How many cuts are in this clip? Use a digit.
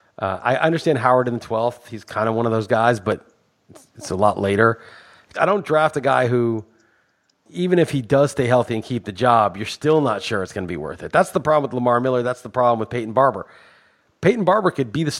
1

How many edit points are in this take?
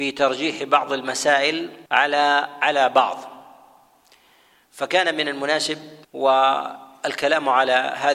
2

